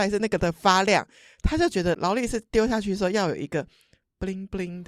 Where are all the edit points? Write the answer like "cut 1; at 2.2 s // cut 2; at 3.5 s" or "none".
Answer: none